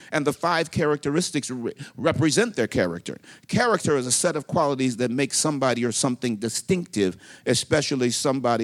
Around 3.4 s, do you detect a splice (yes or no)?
no